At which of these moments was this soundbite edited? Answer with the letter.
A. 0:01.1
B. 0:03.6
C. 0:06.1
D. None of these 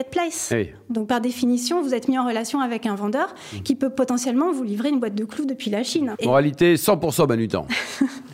C